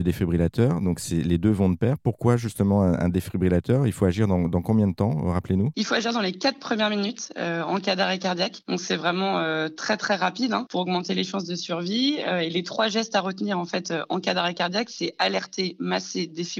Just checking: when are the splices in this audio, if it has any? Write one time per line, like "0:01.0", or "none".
none